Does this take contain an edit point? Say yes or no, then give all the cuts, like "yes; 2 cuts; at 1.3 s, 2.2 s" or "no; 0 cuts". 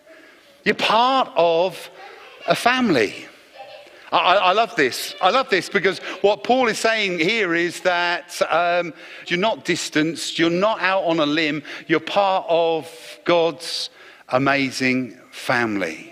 yes; 1 cut; at 9.3 s